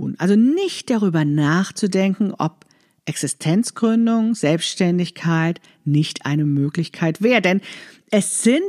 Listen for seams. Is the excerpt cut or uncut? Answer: uncut